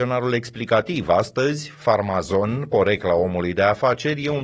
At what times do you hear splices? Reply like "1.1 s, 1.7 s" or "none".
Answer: none